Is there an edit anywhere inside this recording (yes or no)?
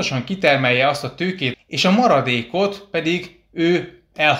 yes